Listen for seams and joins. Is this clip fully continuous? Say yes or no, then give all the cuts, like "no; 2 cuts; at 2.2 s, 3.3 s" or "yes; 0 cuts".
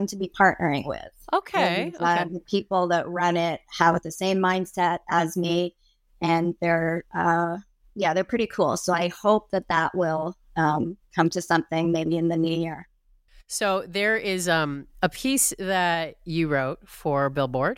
yes; 0 cuts